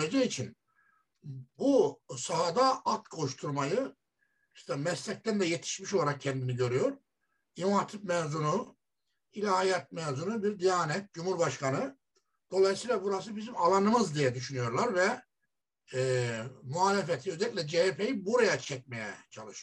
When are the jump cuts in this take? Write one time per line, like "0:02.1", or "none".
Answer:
none